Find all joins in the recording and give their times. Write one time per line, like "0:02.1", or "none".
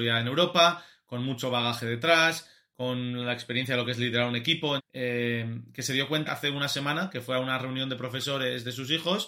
0:04.8
0:06.3

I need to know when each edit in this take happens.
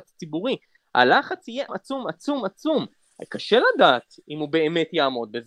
0:01.7

